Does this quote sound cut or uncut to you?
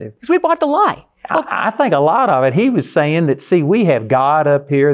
uncut